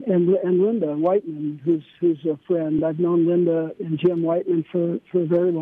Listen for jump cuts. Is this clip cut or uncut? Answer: uncut